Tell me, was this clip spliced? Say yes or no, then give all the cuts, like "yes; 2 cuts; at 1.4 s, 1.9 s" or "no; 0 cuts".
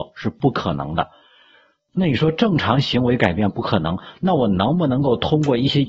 no; 0 cuts